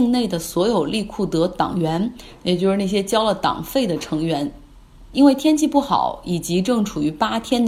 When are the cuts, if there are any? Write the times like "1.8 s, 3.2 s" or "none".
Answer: none